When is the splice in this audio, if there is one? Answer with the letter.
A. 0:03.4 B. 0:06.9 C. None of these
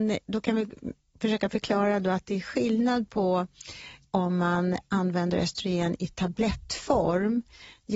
C